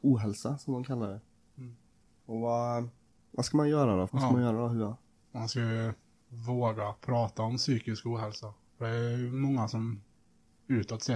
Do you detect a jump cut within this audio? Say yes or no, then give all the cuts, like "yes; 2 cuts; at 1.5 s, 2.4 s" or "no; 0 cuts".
yes; 2 cuts; at 4.1 s, 8.7 s